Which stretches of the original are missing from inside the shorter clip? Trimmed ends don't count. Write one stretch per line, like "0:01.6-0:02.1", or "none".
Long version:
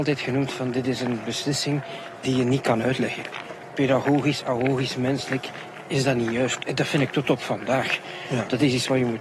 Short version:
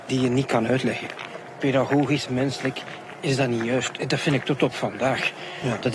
0:04.4-0:04.9